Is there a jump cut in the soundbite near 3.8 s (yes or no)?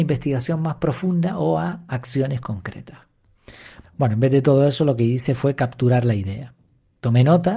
yes